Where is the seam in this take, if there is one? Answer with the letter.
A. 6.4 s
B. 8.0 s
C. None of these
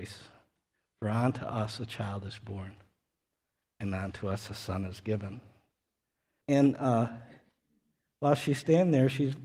A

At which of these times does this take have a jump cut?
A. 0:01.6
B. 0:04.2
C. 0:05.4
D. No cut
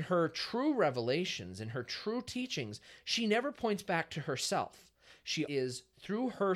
C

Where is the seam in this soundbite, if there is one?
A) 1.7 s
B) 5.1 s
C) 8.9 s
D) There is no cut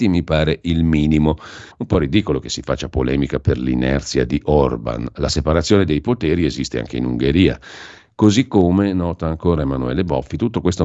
A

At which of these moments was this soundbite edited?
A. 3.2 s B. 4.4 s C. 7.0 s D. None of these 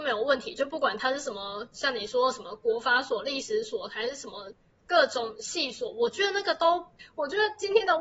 C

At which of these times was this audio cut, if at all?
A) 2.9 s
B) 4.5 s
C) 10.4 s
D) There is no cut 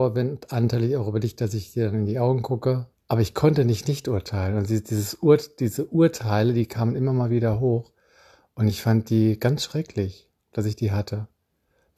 A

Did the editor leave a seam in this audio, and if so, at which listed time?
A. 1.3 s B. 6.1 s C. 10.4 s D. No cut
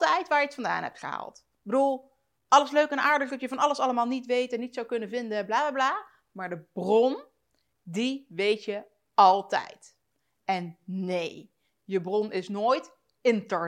D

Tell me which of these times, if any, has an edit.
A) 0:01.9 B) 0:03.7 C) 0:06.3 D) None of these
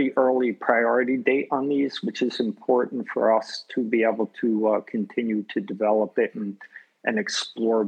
D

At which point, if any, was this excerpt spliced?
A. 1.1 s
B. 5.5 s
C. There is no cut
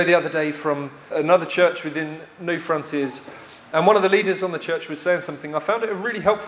A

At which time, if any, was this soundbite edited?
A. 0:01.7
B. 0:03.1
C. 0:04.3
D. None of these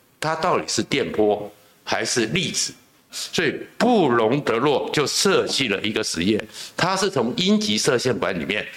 B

